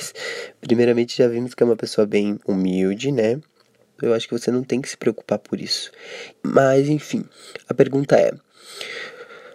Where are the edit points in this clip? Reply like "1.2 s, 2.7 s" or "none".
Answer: 4.0 s, 6.3 s